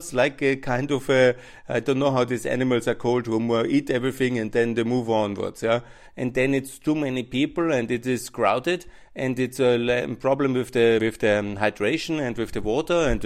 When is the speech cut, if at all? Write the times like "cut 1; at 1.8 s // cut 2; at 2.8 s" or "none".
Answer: cut 1; at 6.1 s // cut 2; at 11.0 s